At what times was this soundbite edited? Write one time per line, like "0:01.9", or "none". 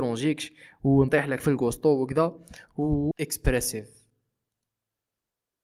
0:03.1